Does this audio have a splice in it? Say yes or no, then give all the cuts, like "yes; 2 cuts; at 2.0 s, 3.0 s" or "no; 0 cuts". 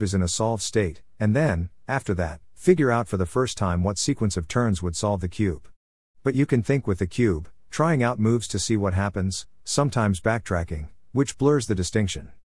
no; 0 cuts